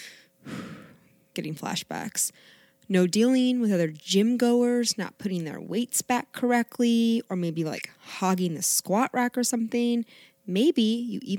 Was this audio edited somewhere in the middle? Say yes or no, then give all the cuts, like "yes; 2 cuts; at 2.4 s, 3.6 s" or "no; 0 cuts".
no; 0 cuts